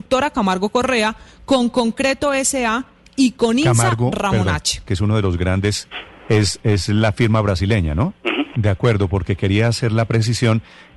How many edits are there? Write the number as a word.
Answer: two